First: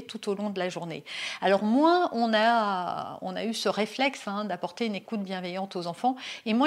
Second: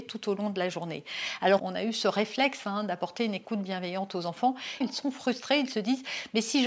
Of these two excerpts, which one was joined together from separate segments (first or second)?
second